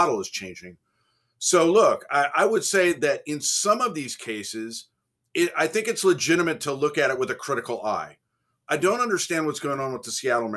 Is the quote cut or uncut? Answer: uncut